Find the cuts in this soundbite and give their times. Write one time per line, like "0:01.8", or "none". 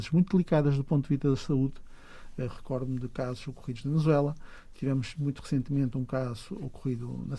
none